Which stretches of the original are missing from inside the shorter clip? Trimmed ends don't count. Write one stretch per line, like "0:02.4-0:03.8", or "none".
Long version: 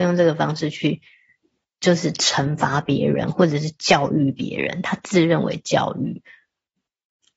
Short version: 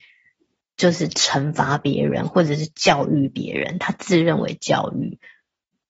none